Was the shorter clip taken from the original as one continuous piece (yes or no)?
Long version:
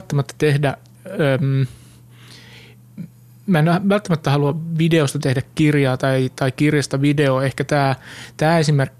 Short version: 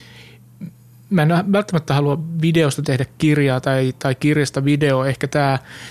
yes